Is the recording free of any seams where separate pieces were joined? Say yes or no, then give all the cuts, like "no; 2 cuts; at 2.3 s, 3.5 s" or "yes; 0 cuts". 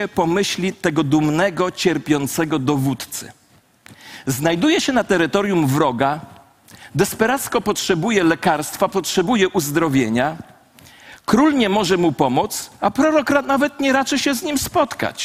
yes; 0 cuts